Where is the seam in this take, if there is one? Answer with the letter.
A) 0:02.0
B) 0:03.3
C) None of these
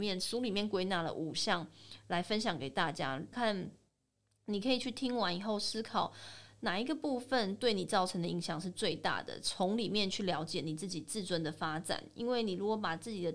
B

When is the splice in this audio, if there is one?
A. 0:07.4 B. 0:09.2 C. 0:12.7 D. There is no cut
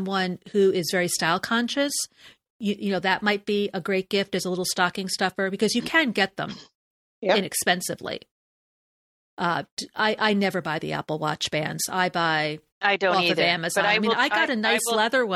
C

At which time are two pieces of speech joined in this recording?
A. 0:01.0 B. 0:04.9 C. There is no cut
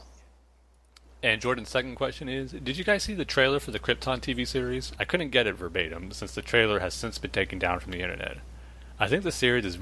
B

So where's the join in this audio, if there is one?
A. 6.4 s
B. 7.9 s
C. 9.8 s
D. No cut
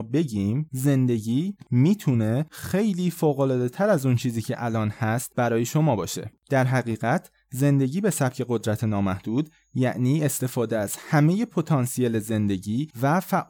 A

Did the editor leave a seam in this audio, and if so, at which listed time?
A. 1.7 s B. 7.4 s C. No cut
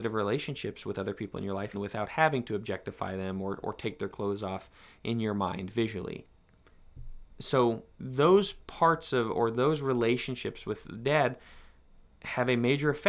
A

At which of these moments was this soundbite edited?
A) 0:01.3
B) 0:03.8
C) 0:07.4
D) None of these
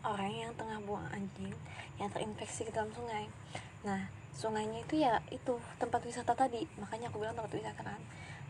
D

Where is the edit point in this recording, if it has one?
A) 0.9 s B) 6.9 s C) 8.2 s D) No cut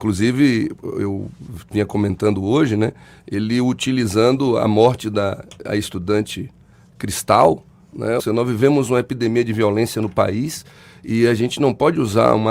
C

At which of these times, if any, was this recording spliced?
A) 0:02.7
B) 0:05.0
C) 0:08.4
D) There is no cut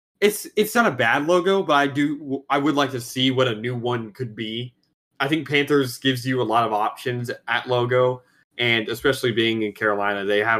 D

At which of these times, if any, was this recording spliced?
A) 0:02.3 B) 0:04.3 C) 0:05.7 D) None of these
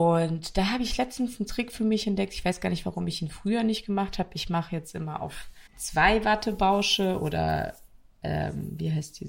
C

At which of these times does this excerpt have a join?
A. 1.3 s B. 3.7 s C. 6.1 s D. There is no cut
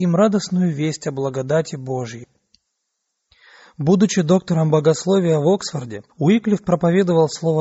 C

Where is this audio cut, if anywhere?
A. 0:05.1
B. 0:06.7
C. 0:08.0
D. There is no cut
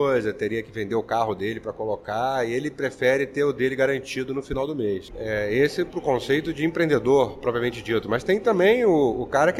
A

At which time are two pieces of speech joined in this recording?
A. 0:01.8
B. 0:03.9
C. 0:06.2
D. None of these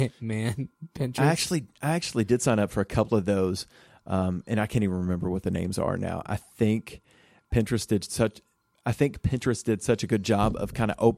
D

